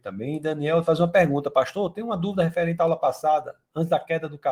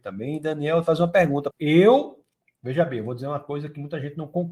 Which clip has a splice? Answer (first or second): second